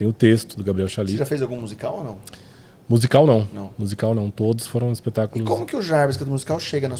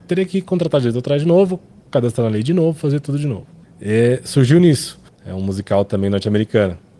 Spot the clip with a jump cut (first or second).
second